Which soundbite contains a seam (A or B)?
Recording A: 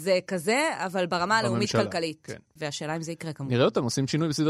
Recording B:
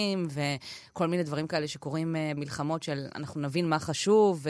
B